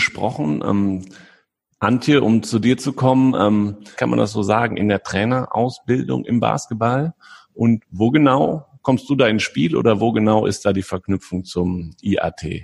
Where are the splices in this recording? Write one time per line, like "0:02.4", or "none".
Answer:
0:04.0